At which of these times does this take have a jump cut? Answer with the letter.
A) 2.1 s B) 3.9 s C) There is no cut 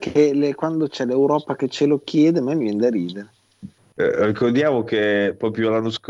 B